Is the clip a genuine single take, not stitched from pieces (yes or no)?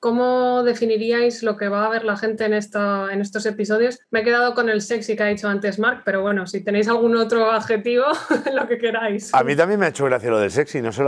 no